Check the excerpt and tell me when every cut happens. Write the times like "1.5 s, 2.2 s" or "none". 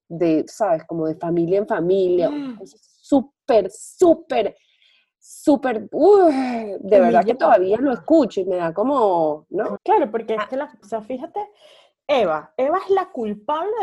9.8 s, 10.8 s